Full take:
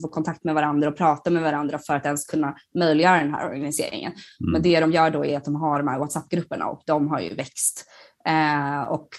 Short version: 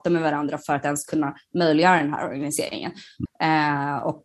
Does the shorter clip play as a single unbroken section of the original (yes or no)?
no